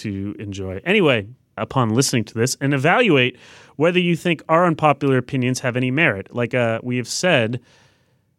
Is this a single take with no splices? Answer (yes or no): no